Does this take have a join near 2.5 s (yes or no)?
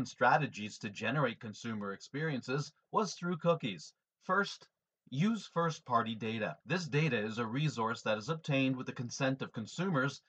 no